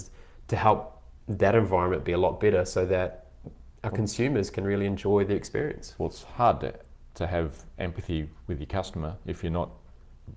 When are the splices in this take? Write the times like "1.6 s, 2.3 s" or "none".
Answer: none